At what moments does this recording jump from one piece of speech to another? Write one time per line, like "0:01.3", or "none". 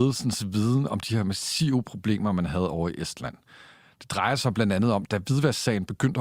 none